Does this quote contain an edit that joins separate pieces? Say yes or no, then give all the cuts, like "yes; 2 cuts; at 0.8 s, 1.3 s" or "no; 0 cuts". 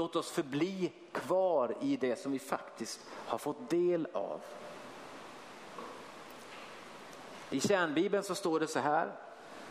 no; 0 cuts